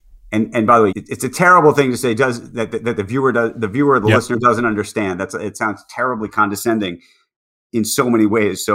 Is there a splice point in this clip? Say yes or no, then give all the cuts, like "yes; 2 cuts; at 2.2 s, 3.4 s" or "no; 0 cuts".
yes; 1 cut; at 0.9 s